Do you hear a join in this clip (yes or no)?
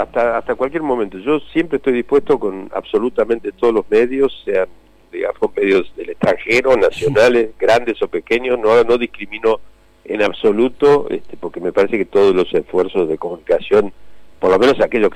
no